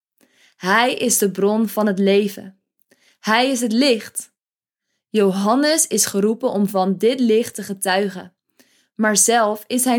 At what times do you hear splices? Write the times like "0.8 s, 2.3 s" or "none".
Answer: none